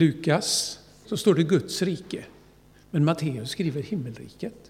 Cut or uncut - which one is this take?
cut